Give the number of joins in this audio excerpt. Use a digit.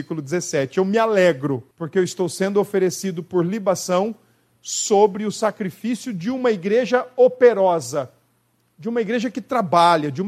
1